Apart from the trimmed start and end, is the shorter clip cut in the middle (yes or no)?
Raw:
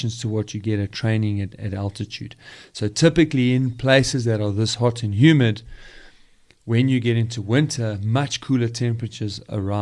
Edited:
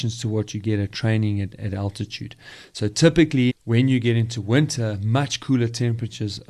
yes